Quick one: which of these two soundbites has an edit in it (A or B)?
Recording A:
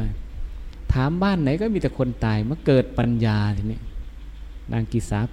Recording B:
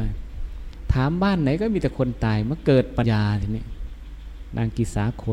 B